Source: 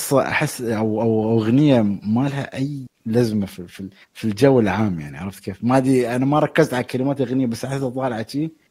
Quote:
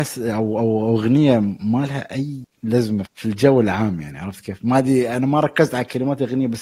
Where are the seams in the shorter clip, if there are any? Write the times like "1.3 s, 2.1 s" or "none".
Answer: 3.1 s